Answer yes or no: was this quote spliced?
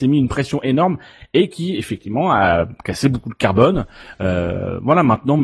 no